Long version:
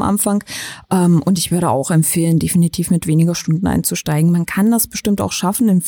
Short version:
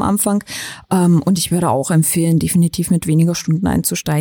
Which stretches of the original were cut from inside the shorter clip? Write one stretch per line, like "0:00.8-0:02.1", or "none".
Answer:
none